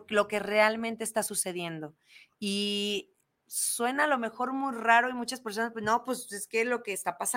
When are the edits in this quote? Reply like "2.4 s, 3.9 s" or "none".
none